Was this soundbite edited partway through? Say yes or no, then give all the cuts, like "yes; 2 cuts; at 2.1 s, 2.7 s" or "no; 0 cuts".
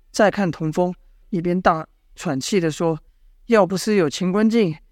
yes; 2 cuts; at 1.2 s, 3.1 s